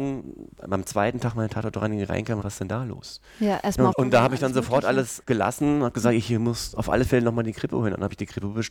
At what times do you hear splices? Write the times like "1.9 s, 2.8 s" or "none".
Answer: 2.4 s, 3.9 s